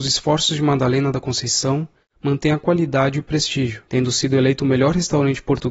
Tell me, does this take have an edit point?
no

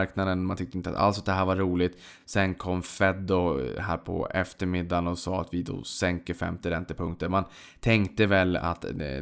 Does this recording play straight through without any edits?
yes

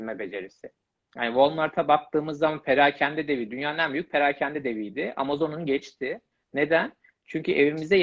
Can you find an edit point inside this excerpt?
no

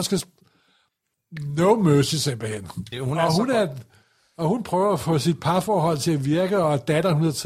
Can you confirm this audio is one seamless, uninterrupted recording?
no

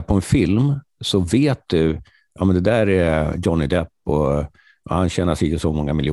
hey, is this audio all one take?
yes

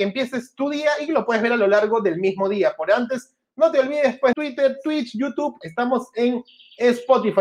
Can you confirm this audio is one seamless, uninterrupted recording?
no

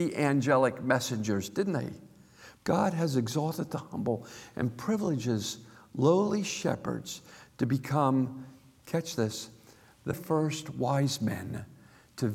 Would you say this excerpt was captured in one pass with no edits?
no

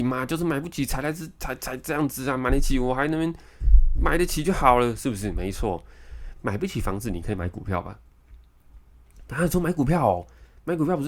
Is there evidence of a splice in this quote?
no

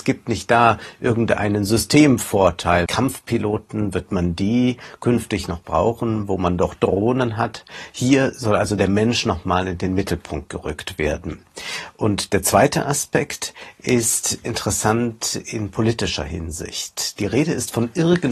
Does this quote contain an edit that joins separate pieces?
yes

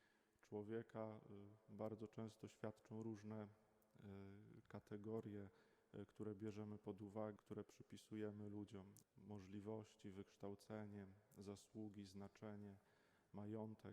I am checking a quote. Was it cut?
yes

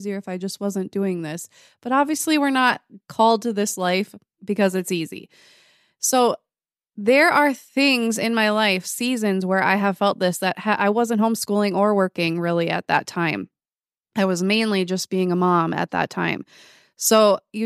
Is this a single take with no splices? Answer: yes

